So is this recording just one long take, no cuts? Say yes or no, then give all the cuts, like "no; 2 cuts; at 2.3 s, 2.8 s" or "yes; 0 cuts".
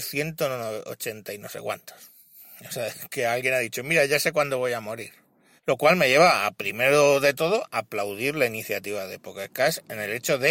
no; 1 cut; at 5.6 s